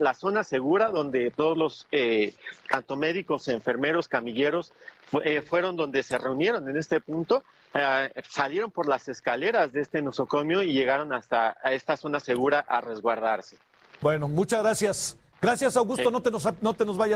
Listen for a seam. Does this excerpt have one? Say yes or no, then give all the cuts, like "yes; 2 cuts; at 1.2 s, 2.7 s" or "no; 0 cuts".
no; 0 cuts